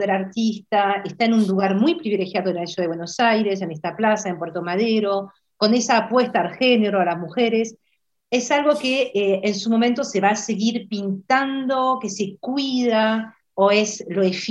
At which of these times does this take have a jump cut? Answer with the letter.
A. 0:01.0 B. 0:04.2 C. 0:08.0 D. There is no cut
D